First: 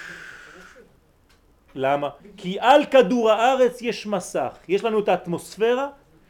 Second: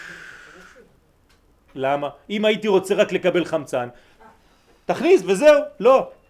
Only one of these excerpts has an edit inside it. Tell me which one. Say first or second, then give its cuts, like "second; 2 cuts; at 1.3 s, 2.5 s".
first; 1 cut; at 2.2 s